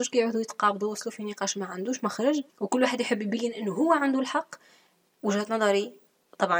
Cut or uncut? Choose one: cut